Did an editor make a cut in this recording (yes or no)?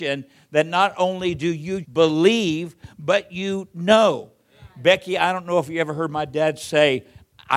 yes